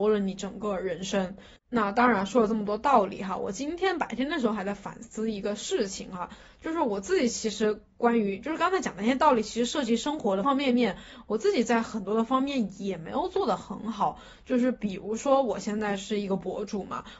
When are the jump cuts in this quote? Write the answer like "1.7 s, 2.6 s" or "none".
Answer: 10.4 s

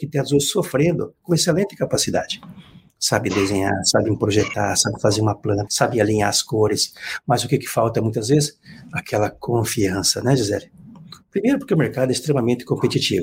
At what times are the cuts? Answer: 5.7 s

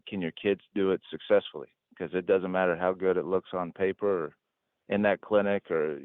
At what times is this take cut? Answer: none

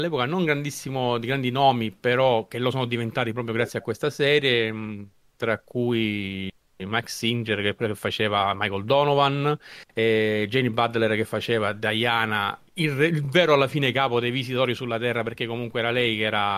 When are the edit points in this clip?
none

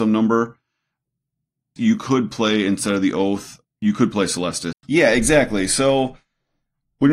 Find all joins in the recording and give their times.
1.8 s, 3.6 s, 4.7 s

